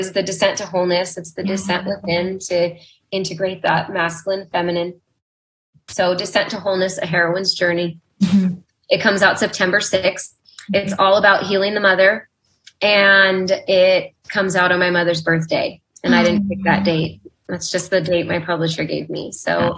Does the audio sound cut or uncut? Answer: uncut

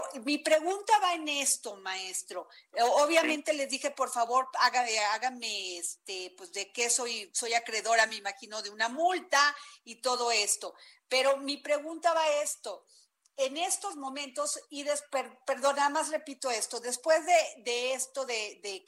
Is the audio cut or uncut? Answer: uncut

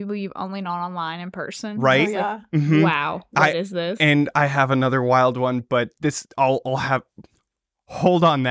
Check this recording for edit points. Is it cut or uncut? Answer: uncut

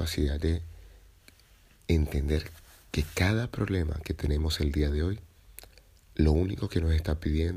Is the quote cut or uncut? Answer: uncut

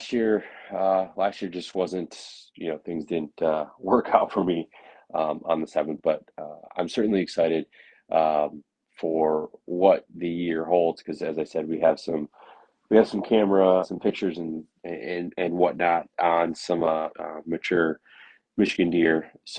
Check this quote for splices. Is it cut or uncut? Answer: cut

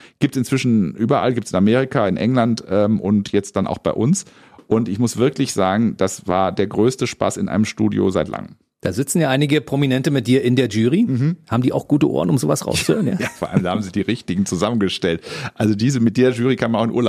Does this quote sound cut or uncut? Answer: uncut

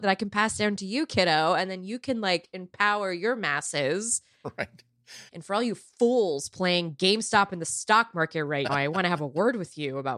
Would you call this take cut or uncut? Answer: cut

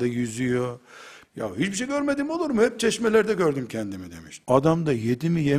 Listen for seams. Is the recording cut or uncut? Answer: cut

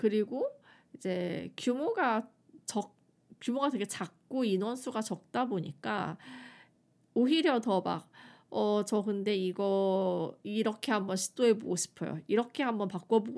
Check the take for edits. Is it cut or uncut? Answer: uncut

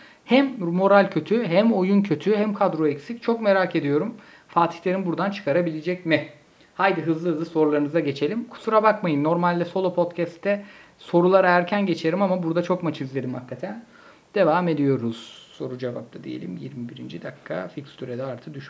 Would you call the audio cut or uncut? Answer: uncut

